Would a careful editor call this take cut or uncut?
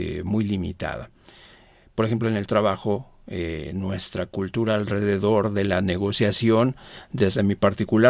uncut